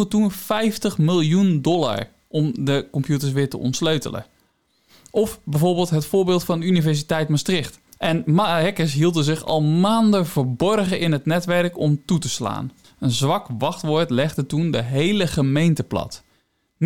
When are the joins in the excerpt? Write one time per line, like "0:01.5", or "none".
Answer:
0:07.9
0:12.8